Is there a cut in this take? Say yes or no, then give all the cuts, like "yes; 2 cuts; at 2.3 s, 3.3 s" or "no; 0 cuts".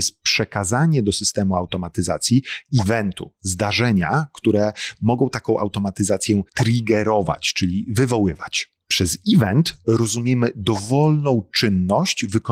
no; 0 cuts